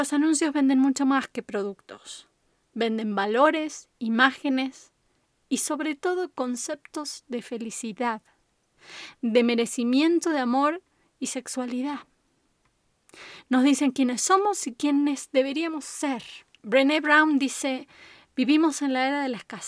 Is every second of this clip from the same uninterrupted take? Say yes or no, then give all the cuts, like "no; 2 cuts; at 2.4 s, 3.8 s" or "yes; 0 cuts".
yes; 0 cuts